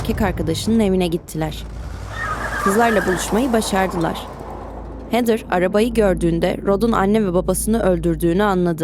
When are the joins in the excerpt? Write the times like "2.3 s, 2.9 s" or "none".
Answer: none